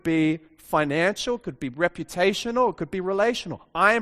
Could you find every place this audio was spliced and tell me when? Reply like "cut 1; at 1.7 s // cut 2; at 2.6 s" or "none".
none